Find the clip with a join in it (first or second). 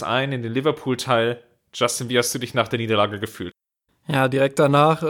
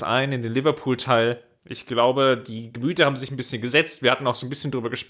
second